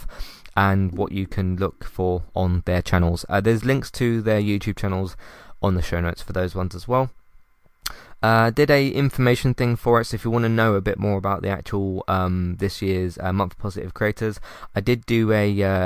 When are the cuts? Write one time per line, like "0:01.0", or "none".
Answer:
none